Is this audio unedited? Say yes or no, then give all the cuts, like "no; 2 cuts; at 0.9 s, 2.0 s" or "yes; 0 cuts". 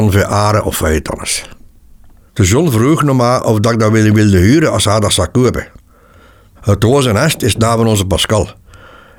no; 2 cuts; at 2.3 s, 6.6 s